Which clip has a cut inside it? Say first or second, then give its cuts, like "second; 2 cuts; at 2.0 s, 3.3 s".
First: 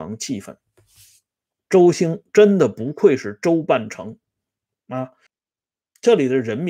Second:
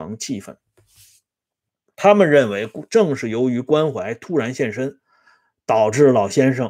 first; 2 cuts; at 1.6 s, 5.3 s